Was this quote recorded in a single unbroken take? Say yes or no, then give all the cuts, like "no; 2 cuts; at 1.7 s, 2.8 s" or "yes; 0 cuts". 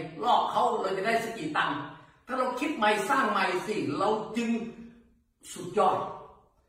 yes; 0 cuts